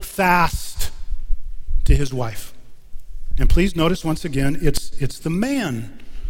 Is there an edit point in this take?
yes; 1 cut; at 3.3 s

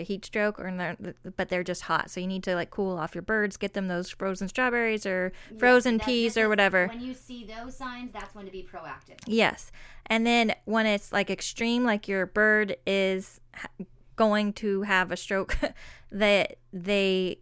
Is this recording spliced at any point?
no; 0 cuts

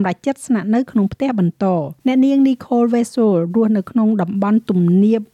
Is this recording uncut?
no; 1 cut; at 2.0 s

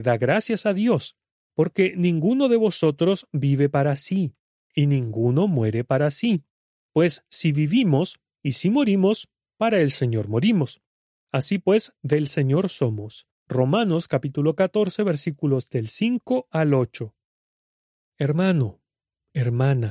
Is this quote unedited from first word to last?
no; 3 cuts; at 1.5 s, 8.4 s, 12.0 s

